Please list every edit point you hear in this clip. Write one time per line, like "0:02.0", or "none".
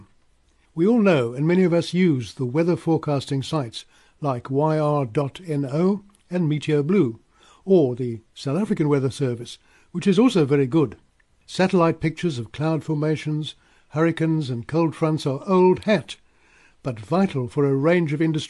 none